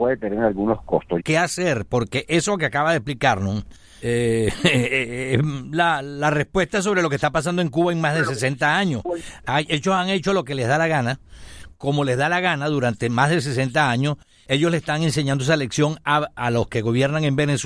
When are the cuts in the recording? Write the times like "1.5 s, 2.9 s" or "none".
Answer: 1.2 s